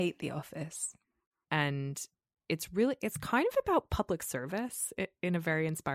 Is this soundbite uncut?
no; 1 cut; at 1.4 s

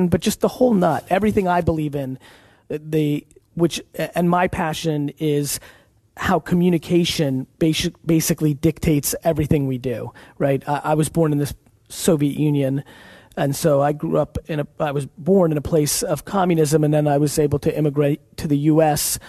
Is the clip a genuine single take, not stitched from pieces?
yes; 0 cuts

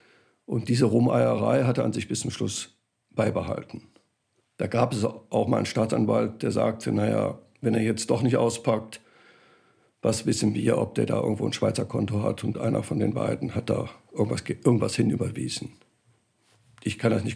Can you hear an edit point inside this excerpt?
no; 0 cuts

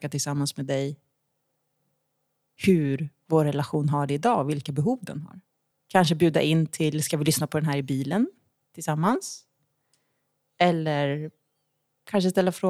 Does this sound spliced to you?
yes; 1 cut; at 5.7 s

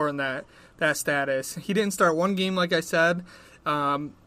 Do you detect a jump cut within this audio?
no; 0 cuts

